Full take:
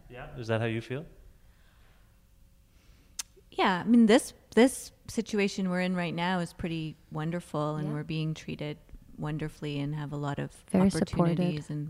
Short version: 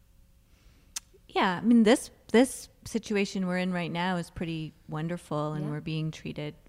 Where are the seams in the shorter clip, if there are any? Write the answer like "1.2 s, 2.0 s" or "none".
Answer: none